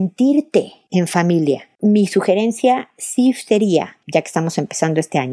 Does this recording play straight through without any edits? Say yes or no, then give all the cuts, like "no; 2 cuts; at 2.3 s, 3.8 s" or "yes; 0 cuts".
yes; 0 cuts